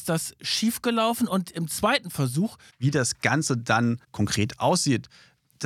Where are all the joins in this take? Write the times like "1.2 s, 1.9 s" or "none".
2.7 s, 4.0 s